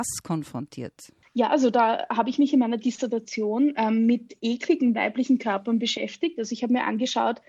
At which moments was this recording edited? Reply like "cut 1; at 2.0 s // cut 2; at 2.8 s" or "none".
none